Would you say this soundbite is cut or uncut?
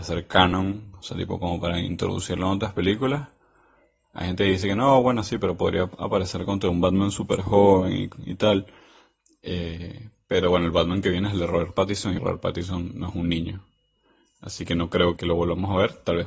cut